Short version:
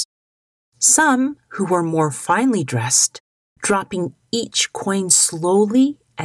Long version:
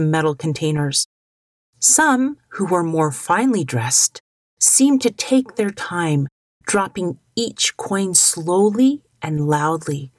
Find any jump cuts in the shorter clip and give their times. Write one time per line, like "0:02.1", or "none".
0:03.5